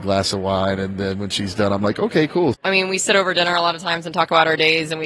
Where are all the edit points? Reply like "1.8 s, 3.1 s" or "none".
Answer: 2.5 s